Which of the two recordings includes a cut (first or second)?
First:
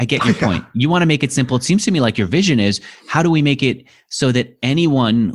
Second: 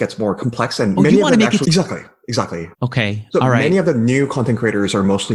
second